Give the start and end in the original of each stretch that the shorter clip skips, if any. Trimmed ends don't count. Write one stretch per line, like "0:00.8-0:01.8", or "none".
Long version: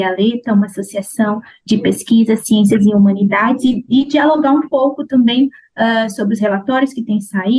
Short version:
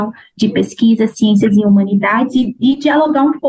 none